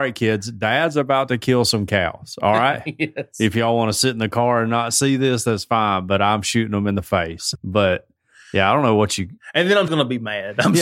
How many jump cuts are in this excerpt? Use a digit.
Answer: 2